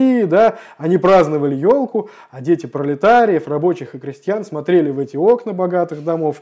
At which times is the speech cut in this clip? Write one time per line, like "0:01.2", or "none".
none